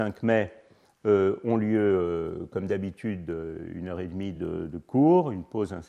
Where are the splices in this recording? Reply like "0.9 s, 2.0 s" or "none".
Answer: none